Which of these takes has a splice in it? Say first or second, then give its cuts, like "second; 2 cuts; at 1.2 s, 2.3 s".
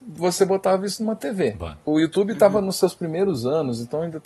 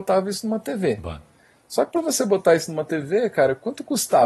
first; 1 cut; at 1.9 s